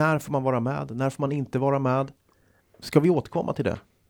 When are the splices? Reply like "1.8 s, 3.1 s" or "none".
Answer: 2.6 s